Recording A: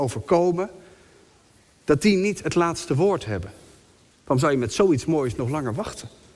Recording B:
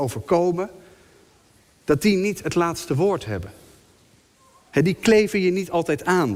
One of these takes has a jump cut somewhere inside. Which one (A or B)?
A